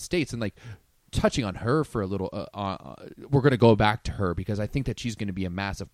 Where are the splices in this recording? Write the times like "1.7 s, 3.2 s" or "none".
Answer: none